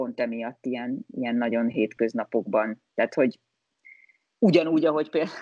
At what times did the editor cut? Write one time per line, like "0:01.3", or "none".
none